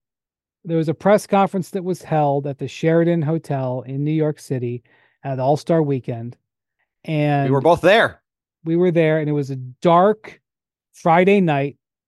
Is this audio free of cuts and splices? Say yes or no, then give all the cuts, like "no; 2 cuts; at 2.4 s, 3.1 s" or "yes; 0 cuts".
no; 1 cut; at 10.8 s